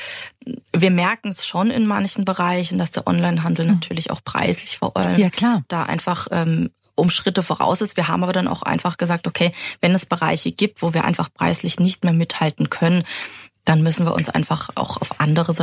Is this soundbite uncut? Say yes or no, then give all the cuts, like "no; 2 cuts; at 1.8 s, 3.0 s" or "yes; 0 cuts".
yes; 0 cuts